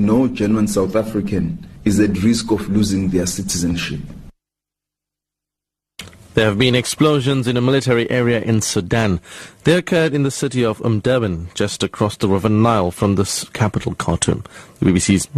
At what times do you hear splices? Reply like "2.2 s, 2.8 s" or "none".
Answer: none